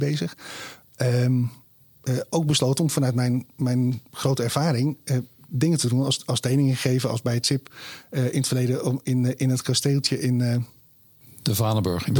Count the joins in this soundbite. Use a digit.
0